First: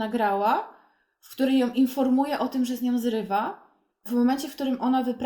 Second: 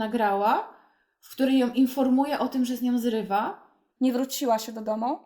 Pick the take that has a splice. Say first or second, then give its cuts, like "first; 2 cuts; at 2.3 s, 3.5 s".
second; 1 cut; at 4.0 s